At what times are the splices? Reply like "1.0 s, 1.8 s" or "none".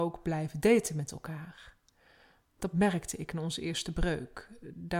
none